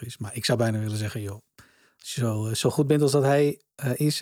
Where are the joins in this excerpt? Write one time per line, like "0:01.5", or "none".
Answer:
none